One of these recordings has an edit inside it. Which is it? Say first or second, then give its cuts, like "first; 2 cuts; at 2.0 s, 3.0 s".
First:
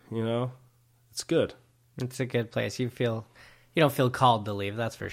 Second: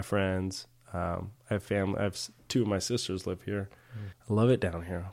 second; 1 cut; at 4.1 s